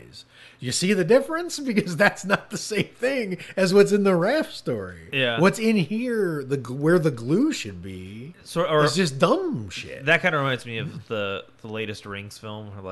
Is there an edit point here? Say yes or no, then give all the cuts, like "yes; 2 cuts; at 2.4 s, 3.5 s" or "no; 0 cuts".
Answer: no; 0 cuts